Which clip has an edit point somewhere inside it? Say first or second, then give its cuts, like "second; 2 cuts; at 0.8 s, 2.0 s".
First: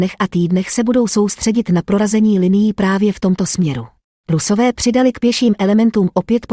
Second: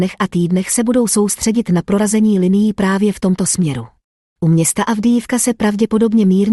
first; 1 cut; at 4.2 s